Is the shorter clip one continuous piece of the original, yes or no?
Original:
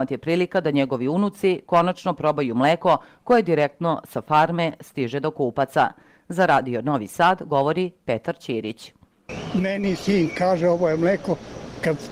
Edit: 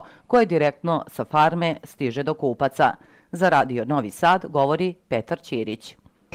yes